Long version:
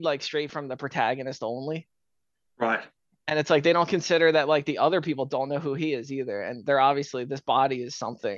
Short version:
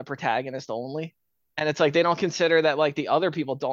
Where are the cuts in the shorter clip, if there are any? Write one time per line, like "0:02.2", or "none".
0:01.5